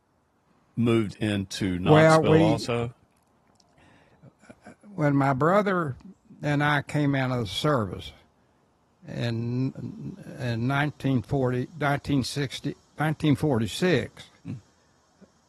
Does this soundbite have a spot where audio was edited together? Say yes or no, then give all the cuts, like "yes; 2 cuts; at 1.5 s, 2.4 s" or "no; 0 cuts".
yes; 1 cut; at 9.8 s